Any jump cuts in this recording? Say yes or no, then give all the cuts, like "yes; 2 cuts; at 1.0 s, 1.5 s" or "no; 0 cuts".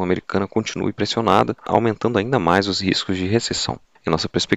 yes; 1 cut; at 1.6 s